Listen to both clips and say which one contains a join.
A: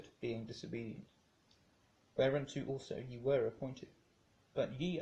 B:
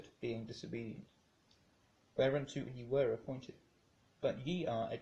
B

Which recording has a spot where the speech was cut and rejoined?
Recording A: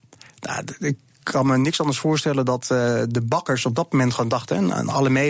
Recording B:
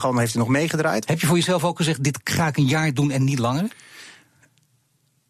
B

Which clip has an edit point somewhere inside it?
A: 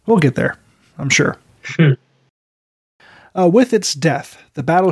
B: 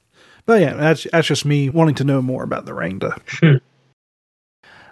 B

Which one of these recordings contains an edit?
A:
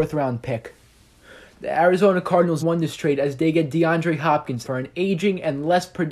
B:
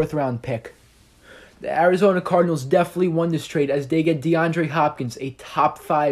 A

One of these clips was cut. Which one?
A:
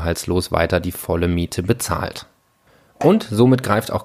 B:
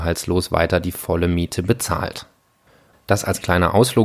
B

